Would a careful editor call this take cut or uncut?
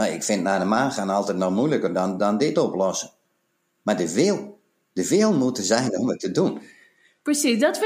uncut